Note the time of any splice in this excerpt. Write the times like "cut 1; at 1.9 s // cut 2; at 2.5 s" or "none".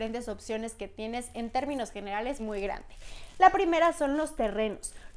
cut 1; at 2.4 s